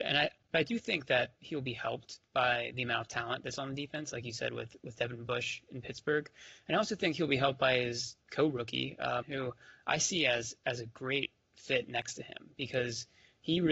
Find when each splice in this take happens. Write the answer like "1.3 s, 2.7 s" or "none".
9.2 s